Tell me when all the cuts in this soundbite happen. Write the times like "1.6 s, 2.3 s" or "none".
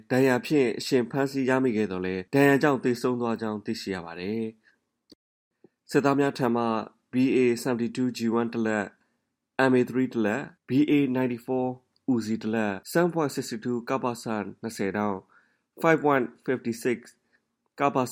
2.3 s, 10.6 s, 12.8 s